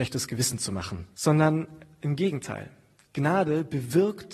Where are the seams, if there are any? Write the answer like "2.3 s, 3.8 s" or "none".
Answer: 1.1 s